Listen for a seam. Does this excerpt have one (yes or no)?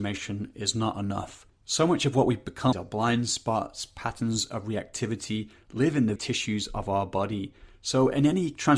yes